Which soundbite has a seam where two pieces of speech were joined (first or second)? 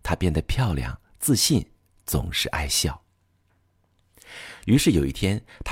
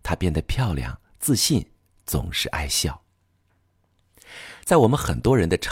first